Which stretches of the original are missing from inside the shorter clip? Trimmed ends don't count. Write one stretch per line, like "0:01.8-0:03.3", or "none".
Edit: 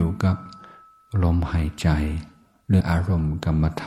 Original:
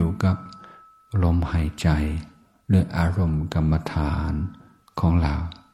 0:02.8-0:02.9